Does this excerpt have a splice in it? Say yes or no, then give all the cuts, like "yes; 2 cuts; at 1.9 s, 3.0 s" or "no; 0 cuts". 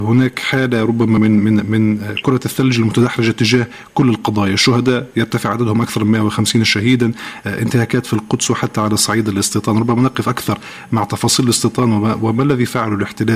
no; 0 cuts